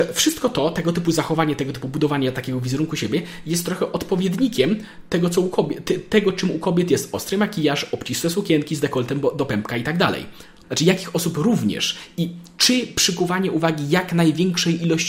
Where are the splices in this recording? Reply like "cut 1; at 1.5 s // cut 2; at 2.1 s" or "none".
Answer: cut 1; at 10.6 s